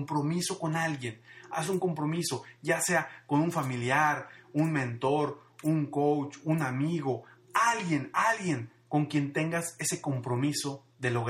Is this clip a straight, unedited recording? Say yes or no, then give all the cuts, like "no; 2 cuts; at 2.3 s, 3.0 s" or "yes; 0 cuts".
yes; 0 cuts